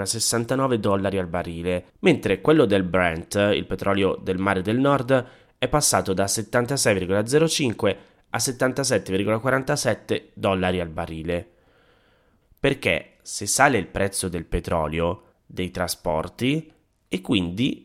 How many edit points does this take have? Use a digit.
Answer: 3